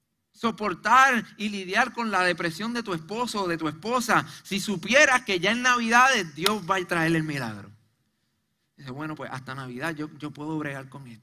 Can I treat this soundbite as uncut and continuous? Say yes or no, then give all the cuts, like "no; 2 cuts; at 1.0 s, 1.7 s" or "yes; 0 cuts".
yes; 0 cuts